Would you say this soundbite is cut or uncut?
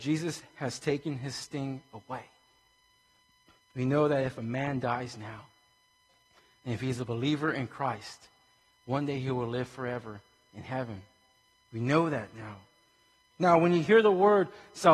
cut